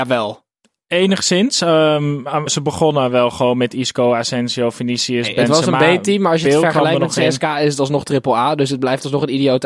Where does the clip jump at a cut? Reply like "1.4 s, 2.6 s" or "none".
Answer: 2.5 s